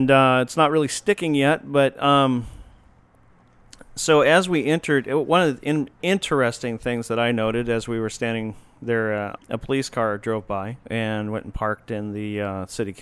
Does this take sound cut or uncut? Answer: cut